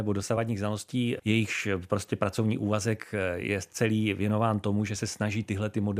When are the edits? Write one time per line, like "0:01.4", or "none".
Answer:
0:01.2